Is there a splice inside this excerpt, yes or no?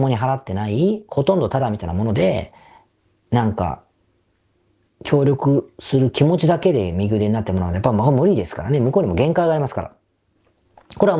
no